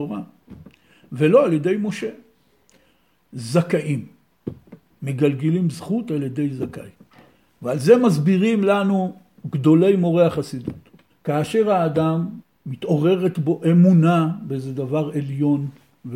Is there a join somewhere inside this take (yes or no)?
yes